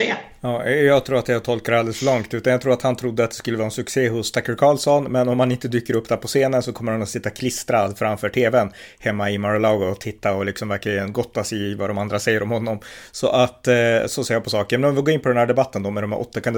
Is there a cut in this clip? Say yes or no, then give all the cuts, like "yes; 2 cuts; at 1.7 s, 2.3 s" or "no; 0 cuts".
no; 0 cuts